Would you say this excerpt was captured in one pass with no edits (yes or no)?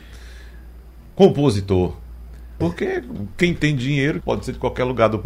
no